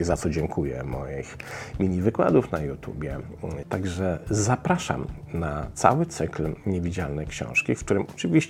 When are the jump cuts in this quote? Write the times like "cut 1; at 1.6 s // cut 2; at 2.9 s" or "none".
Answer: cut 1; at 3.6 s